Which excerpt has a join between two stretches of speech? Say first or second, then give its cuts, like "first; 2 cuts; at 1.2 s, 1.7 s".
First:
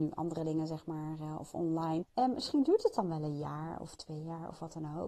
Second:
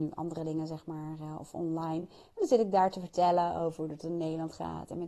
first; 1 cut; at 2.0 s